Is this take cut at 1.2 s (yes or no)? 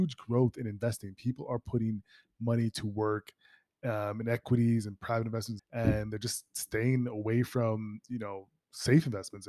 no